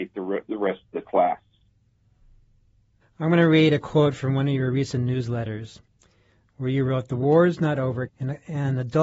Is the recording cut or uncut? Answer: cut